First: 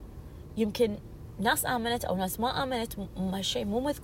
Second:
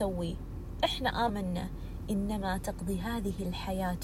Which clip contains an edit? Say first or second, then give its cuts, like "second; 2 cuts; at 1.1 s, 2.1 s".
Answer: second; 1 cut; at 1.3 s